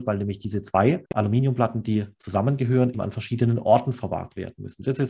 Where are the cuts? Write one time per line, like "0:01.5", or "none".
0:01.0
0:02.9